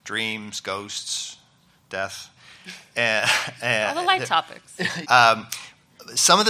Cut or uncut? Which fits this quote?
cut